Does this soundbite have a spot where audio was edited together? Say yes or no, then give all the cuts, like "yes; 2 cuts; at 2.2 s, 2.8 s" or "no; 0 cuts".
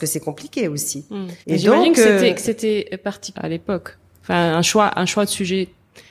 yes; 2 cuts; at 1.4 s, 3.3 s